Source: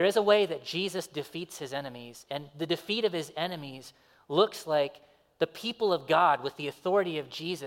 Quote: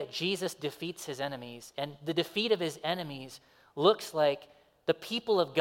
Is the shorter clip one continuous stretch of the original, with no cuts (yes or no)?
yes